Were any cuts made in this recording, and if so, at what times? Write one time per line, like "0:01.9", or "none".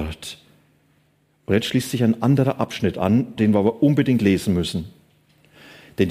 0:03.4

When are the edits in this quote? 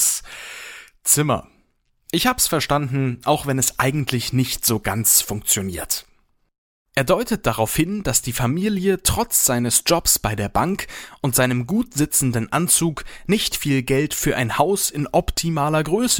none

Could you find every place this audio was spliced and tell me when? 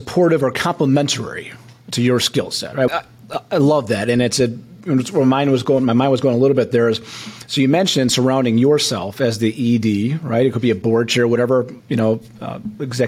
0:02.9

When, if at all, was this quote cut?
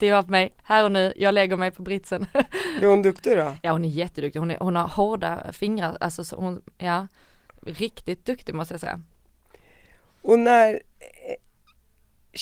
none

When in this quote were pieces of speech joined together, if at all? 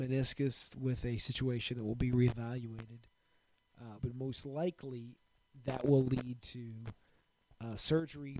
0:04.0

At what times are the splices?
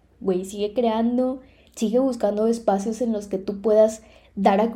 0:01.7

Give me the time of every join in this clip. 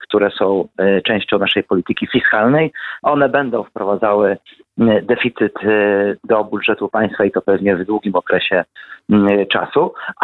0:03.0

